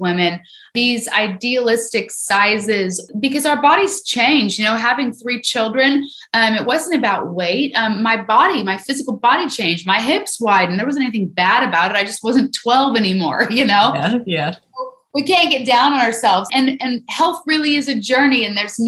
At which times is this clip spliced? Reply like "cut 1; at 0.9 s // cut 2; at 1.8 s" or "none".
cut 1; at 16.5 s